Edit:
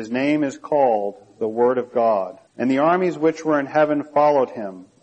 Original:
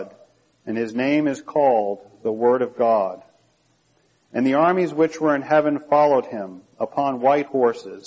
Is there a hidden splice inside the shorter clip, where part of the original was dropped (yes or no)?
yes